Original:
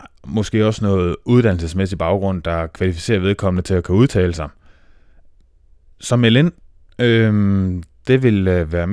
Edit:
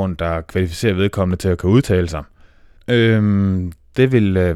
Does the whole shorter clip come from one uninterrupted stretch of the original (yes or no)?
no